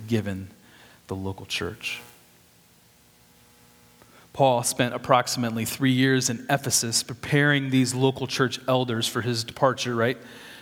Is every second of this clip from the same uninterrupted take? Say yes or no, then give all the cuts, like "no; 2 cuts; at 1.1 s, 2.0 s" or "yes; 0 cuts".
yes; 0 cuts